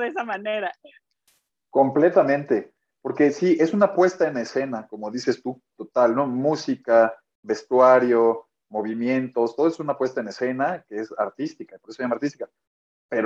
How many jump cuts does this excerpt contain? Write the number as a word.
zero